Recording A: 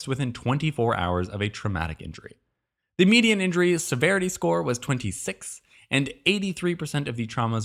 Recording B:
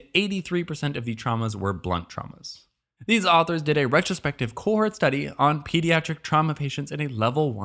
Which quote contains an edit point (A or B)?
B